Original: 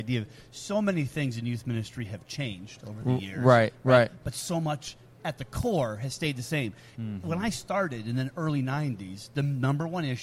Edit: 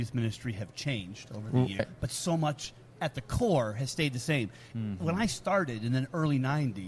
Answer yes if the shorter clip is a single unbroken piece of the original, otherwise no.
no